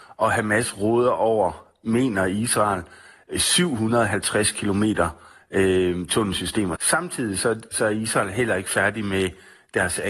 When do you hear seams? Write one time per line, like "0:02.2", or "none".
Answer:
0:06.8